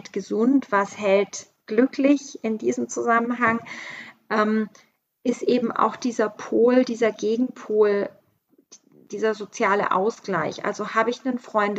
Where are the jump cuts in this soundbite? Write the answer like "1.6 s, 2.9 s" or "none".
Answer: none

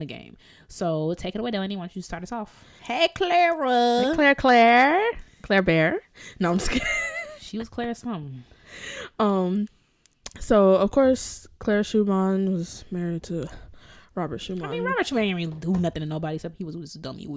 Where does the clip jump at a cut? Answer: 2.8 s

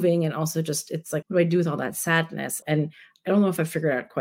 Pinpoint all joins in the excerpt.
1.2 s, 2.6 s

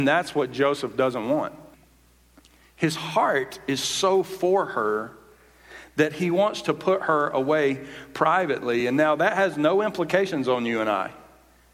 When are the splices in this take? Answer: none

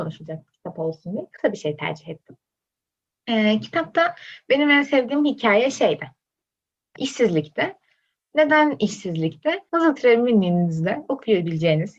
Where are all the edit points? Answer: 7.0 s, 9.7 s

